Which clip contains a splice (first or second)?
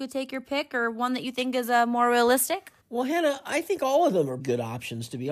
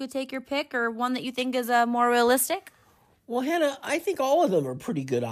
first